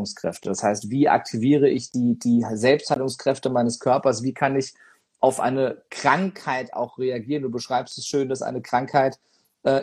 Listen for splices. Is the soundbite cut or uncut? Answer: uncut